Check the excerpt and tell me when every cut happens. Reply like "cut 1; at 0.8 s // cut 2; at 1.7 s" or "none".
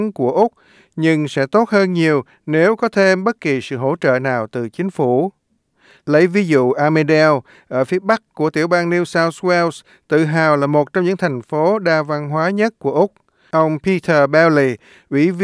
none

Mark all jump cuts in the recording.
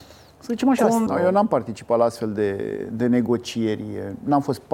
cut 1; at 1.1 s

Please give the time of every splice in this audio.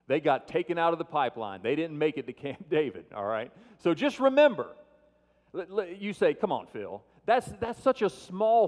none

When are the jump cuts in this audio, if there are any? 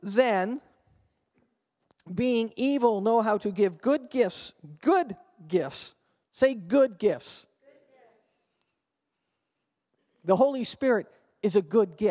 cut 1; at 6.2 s

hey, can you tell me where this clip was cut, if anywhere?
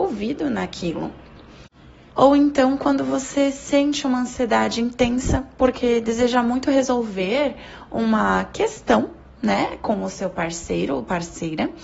cut 1; at 2.1 s

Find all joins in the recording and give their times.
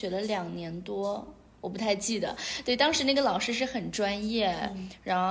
none

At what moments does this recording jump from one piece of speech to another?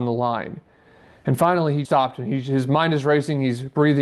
cut 1; at 1.8 s

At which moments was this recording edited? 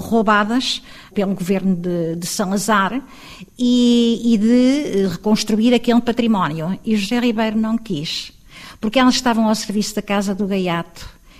none

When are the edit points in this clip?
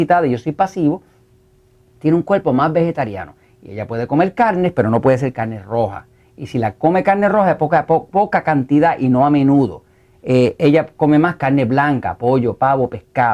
none

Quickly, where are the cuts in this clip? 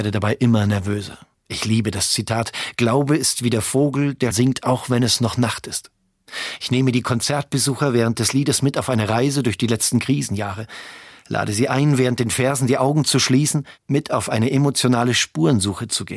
cut 1; at 1.3 s // cut 2; at 4.3 s

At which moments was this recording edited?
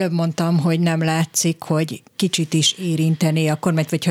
cut 1; at 2.1 s

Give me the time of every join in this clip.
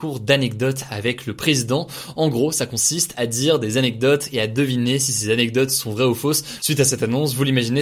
cut 1; at 6.6 s

